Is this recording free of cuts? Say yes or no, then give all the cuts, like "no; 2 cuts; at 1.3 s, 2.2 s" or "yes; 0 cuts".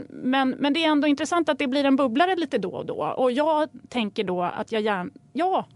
yes; 0 cuts